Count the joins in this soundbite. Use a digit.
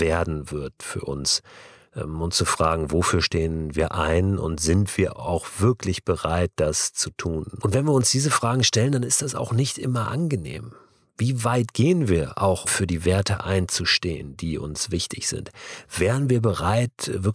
1